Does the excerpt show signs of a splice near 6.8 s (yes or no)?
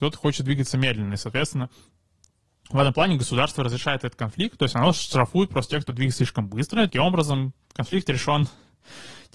no